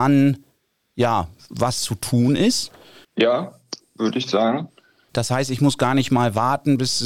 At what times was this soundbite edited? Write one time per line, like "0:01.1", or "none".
0:03.0
0:05.1